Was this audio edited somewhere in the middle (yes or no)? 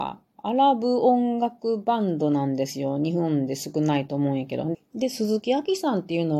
yes